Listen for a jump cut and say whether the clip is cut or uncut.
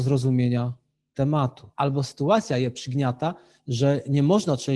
cut